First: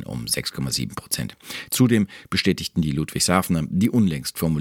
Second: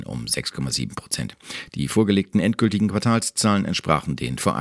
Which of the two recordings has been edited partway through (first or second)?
first